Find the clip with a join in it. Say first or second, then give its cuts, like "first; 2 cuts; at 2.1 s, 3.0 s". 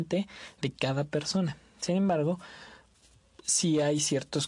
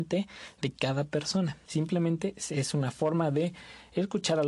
second; 1 cut; at 1.6 s